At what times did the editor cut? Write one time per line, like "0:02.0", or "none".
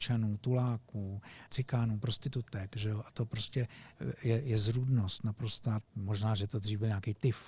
0:01.5
0:05.8